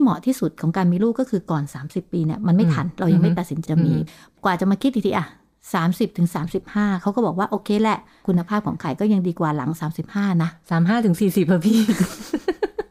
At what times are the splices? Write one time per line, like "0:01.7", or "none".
0:03.7